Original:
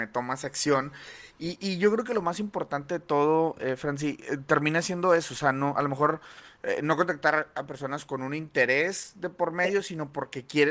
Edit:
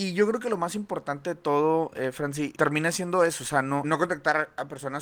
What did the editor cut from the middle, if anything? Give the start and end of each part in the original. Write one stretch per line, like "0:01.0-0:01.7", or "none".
0:04.2-0:04.5
0:05.7-0:06.8